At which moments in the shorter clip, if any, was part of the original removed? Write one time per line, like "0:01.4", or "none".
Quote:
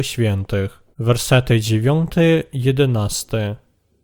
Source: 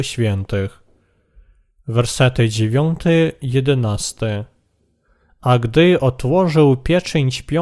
0:00.9